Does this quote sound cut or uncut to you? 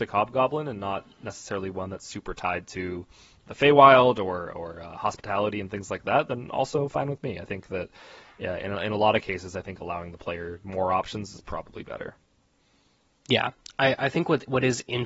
uncut